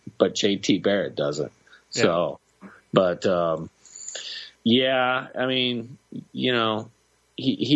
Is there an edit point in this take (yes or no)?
yes